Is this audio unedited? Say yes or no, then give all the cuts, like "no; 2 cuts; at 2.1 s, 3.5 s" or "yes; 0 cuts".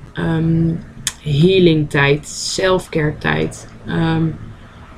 yes; 0 cuts